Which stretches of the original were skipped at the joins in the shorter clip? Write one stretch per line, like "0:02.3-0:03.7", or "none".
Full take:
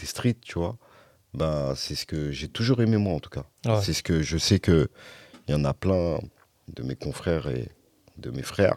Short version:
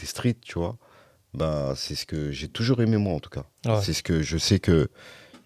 none